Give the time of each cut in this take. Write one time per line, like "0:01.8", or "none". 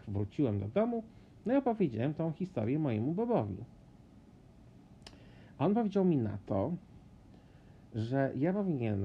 none